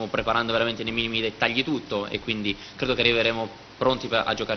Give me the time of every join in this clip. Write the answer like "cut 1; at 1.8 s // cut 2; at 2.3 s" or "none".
none